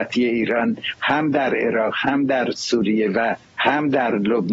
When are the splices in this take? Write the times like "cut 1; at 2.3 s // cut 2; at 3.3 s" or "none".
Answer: cut 1; at 3.5 s